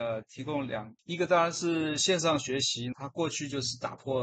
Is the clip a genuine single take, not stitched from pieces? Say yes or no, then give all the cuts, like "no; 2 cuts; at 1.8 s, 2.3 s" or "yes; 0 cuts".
no; 2 cuts; at 1.0 s, 2.9 s